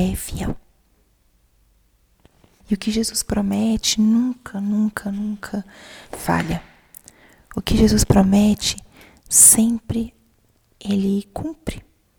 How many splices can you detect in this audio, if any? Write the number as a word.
one